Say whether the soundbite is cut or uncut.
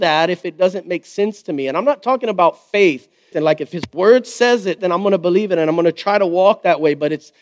cut